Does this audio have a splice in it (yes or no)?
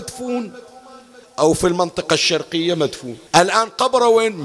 yes